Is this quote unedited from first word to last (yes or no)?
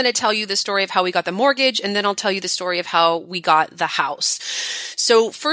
yes